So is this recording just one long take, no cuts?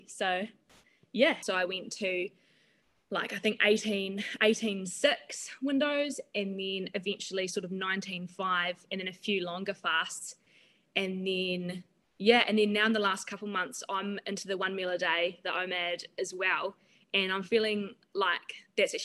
no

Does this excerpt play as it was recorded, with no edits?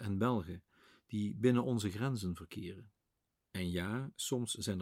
no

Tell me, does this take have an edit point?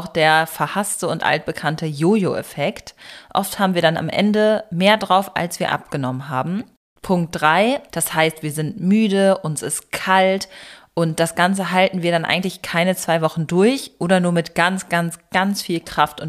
yes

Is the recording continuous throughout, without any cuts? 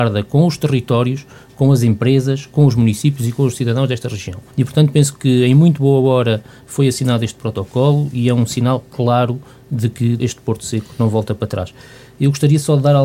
no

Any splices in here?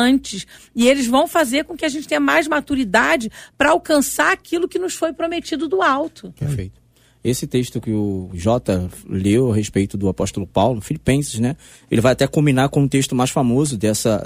yes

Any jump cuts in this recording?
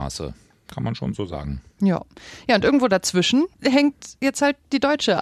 yes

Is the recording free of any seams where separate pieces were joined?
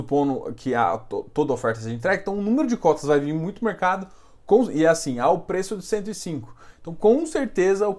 yes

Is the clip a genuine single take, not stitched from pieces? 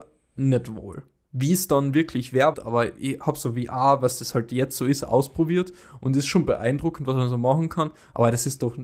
no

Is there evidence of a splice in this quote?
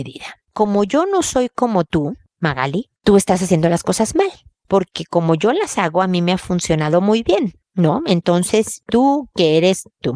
no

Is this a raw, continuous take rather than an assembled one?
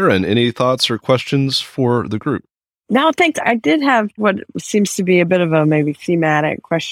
no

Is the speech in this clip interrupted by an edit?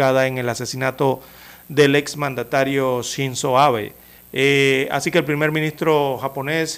yes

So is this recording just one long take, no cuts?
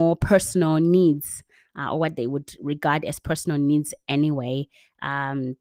yes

